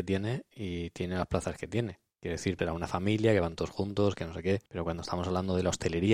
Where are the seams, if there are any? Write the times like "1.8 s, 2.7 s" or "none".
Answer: 2.6 s, 4.7 s